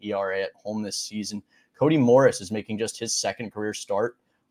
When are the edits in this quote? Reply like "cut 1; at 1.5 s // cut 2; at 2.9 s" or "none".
none